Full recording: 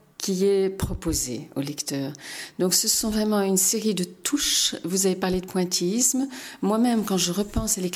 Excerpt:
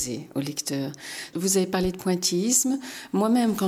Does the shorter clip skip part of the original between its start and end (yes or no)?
yes